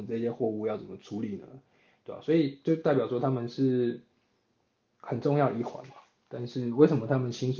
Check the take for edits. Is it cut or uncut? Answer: uncut